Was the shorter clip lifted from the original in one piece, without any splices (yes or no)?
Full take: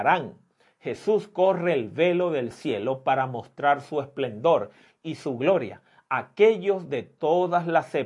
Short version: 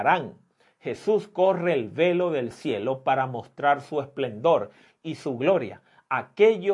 yes